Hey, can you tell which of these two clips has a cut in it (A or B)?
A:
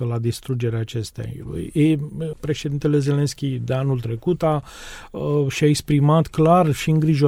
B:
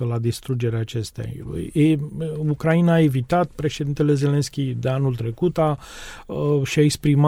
A